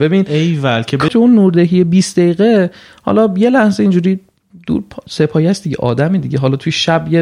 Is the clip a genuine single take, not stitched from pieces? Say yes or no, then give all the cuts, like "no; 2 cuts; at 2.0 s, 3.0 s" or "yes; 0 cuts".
no; 1 cut; at 1.1 s